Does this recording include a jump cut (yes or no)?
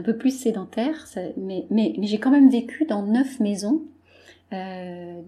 no